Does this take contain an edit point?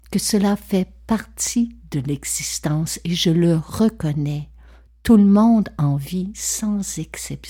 no; 0 cuts

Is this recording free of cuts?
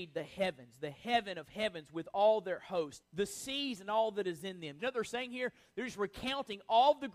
no; 2 cuts; at 3.0 s, 4.8 s

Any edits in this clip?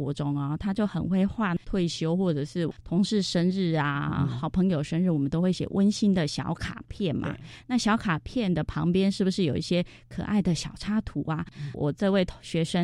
yes; 1 cut; at 11.5 s

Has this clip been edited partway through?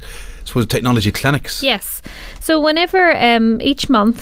no; 0 cuts

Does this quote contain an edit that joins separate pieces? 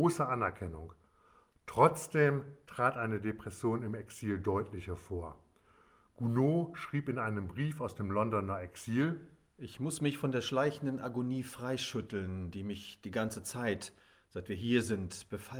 no; 0 cuts

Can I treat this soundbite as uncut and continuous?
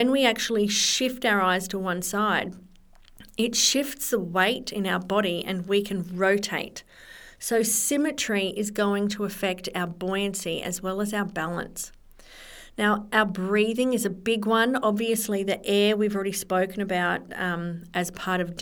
yes; 0 cuts

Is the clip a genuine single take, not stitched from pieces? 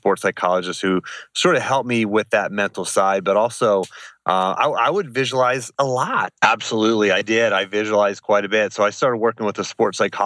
no; 1 cut; at 6.3 s

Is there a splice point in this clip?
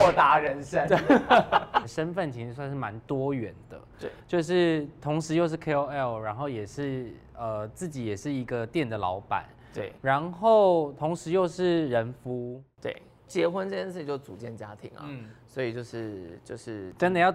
no; 0 cuts

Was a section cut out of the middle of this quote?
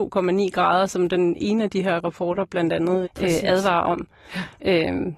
yes; 1 cut; at 3.0 s

